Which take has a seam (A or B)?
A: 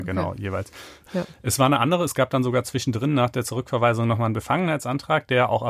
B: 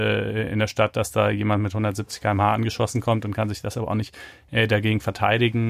A